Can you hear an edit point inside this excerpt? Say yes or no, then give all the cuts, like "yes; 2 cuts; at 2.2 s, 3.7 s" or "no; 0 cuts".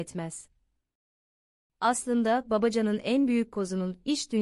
no; 0 cuts